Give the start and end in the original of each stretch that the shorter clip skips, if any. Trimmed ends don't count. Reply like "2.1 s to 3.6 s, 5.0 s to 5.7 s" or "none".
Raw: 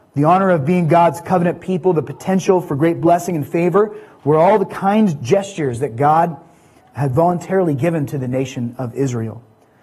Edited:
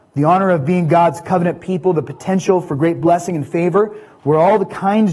none